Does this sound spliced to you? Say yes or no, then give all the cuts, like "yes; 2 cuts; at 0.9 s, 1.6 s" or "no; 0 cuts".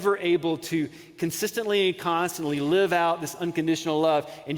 no; 0 cuts